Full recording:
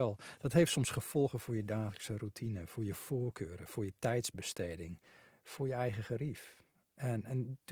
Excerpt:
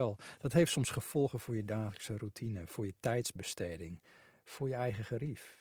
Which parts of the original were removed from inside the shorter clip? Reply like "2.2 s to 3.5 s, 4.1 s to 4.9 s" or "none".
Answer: 2.7 s to 3.7 s